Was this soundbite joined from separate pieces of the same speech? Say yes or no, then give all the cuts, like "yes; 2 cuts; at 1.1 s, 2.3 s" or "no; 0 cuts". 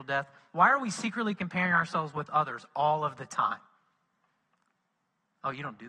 no; 0 cuts